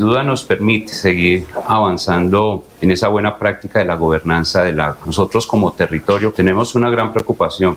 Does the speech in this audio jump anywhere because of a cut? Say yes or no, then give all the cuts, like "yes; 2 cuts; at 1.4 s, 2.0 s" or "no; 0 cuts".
yes; 1 cut; at 6.3 s